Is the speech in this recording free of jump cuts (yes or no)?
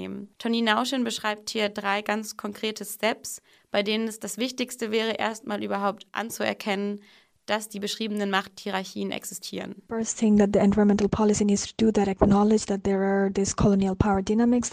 yes